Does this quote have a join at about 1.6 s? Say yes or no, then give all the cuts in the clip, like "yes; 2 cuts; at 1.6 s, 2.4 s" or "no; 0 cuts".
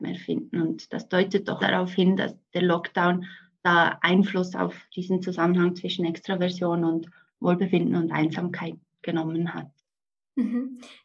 yes; 1 cut; at 1.6 s